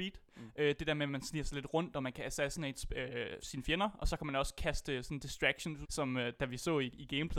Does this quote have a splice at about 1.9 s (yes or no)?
no